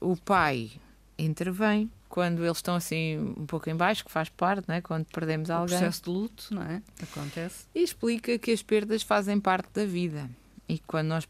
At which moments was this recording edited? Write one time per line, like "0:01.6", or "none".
0:02.0